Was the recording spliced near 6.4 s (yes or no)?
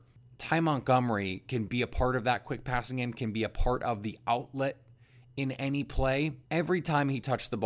yes